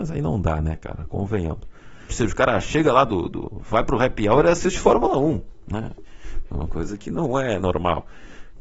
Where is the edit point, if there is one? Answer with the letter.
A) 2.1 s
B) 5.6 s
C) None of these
A